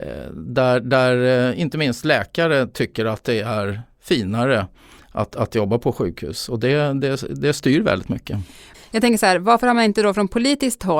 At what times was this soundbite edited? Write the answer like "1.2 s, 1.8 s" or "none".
8.7 s